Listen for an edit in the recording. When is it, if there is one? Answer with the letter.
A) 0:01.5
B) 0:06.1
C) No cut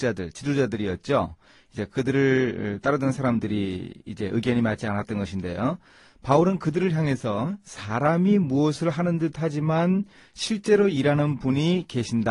C